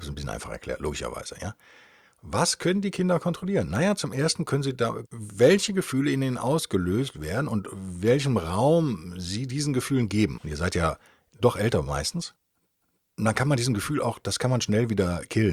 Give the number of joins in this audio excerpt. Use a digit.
2